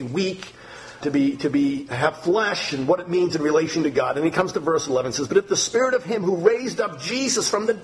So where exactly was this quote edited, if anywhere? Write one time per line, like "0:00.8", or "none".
0:01.0